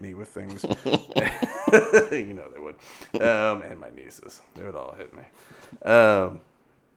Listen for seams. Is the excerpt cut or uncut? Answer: uncut